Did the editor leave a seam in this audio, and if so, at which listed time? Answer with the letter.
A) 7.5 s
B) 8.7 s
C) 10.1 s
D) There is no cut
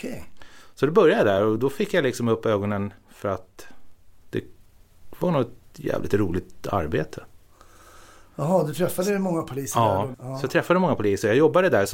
C